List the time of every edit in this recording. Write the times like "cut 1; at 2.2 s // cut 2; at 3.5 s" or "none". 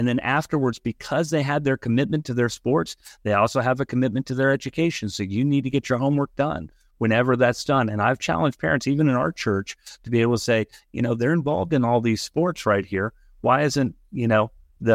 none

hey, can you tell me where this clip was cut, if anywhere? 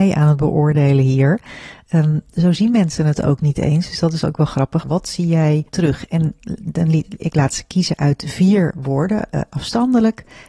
cut 1; at 4.8 s

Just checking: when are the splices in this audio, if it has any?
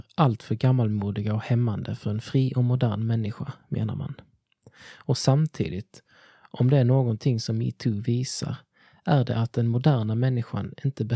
none

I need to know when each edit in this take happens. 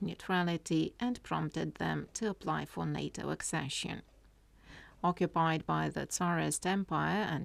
cut 1; at 4.9 s

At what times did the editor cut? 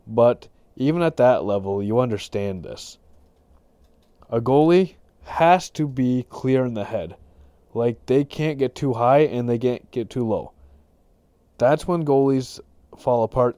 none

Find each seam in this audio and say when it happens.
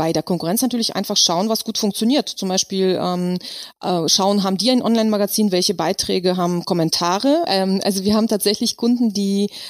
cut 1; at 7.5 s

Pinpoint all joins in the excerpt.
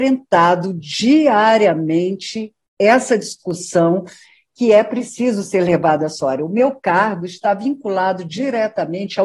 none

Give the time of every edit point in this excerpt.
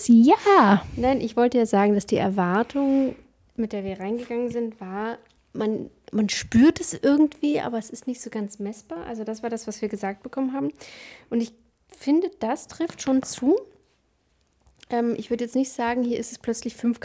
cut 1; at 5.4 s

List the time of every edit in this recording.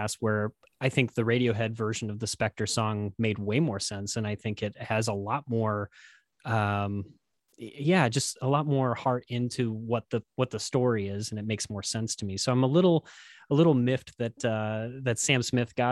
none

